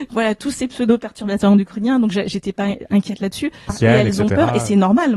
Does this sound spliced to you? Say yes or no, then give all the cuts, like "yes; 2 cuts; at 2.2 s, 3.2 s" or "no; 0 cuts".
yes; 1 cut; at 3.7 s